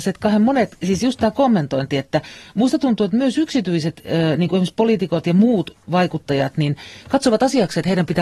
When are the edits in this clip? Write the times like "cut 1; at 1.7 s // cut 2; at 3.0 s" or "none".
none